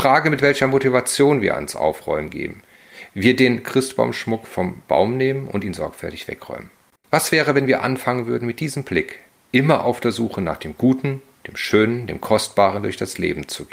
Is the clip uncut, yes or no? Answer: no